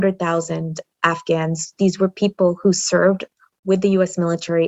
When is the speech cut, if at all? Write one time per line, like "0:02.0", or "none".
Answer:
none